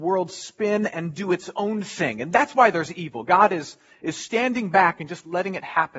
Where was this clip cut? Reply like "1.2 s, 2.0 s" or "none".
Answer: none